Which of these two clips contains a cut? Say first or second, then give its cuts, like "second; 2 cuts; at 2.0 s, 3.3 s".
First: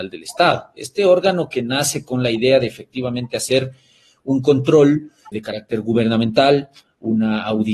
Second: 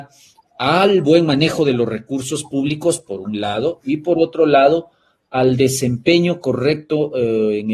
first; 1 cut; at 5.3 s